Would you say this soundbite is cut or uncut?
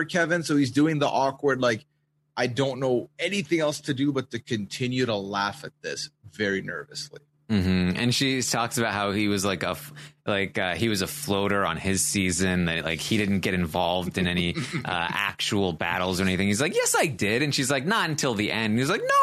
uncut